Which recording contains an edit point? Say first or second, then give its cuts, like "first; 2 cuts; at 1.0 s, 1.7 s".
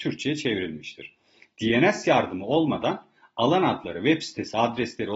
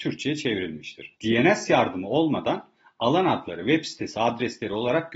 second; 1 cut; at 1.2 s